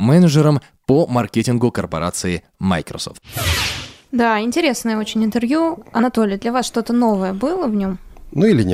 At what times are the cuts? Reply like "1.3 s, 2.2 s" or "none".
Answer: none

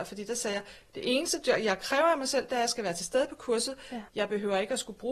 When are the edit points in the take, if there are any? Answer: 4.1 s

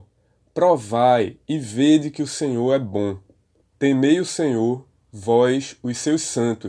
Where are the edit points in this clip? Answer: 3.6 s

